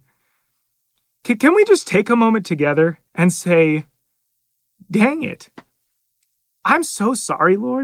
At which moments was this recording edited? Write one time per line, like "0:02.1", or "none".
0:03.1